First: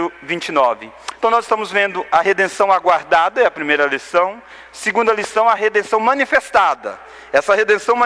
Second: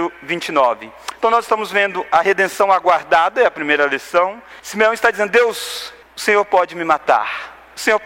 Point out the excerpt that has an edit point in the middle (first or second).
second